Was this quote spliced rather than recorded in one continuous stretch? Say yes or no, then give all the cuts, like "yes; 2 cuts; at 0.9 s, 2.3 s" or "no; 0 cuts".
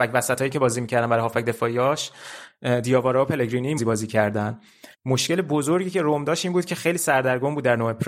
yes; 2 cuts; at 3.8 s, 4.9 s